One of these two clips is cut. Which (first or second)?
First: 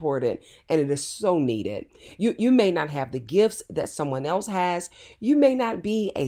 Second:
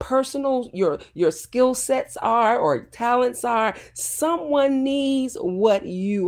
first